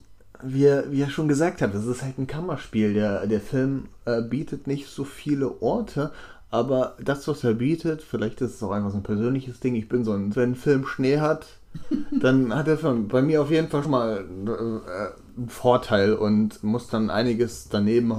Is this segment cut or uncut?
cut